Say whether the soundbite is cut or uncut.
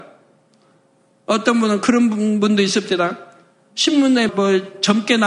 cut